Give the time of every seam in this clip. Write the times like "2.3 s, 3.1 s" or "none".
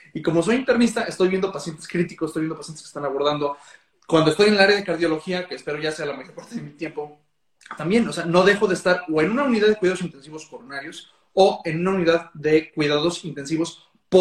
7.8 s